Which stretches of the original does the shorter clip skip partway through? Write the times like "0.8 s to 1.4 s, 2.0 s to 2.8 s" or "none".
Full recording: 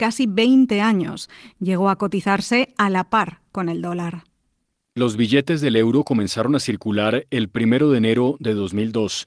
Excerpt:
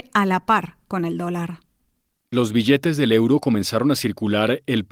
none